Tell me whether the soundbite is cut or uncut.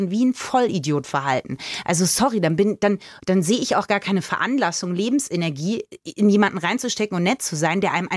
uncut